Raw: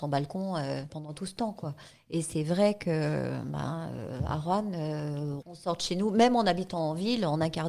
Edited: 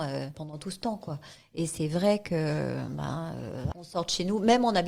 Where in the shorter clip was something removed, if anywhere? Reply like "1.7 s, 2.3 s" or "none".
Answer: 3.7 s